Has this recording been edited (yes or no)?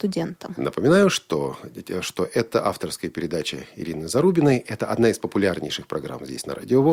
no